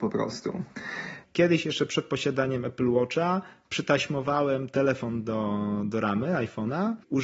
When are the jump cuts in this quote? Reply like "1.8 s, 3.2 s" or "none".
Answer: 1.2 s